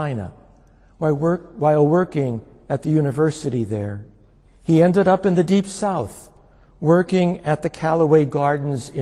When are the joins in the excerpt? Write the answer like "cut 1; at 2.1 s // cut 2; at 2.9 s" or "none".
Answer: cut 1; at 4.5 s